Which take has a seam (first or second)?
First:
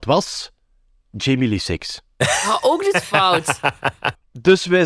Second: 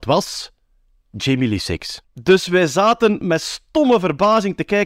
second